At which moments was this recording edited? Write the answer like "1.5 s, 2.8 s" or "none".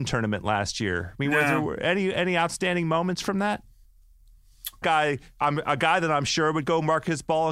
4.8 s